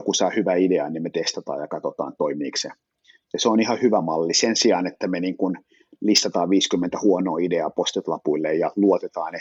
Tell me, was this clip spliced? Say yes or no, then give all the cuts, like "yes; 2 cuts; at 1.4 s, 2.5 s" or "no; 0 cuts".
no; 0 cuts